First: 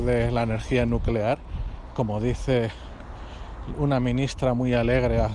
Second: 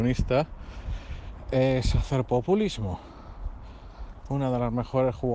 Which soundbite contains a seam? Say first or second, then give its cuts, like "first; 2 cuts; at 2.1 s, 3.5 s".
second; 1 cut; at 4.2 s